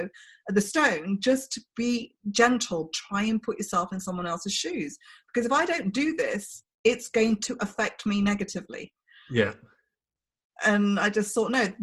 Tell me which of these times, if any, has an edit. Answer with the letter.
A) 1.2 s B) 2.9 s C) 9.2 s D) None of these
B